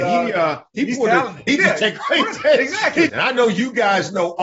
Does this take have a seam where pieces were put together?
yes; 2 cuts; at 1.5 s, 3.1 s

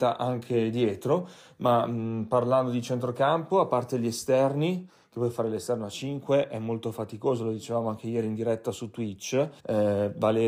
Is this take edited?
yes; 1 cut; at 9.6 s

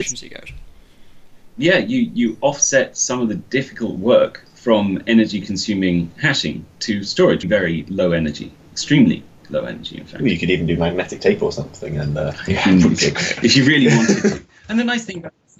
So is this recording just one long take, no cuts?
no; 1 cut; at 7.4 s

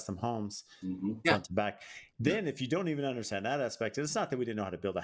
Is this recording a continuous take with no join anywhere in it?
no; 1 cut; at 1.2 s

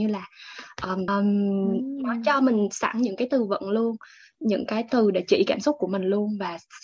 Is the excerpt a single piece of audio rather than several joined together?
no; 1 cut; at 1.1 s

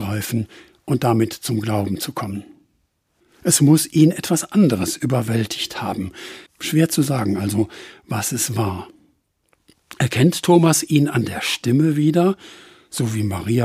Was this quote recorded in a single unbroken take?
no; 2 cuts; at 3.2 s, 6.5 s

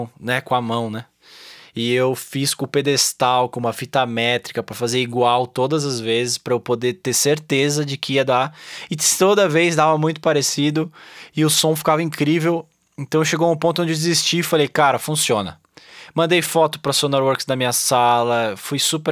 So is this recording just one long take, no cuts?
yes; 0 cuts

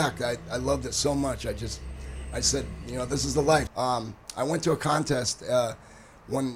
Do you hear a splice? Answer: yes; 1 cut; at 3.7 s

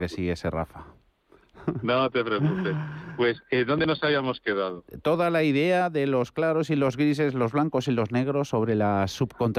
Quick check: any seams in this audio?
no; 0 cuts

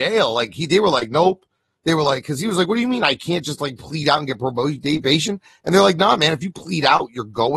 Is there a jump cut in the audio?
no; 0 cuts

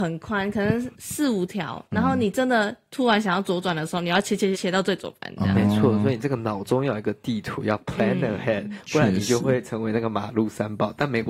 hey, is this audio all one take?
no; 1 cut; at 4.5 s

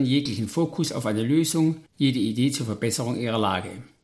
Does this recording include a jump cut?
yes; 1 cut; at 1.9 s

